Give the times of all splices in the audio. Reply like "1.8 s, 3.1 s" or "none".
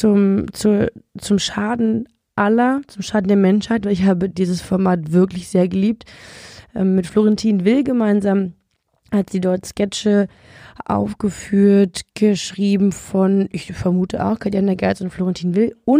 none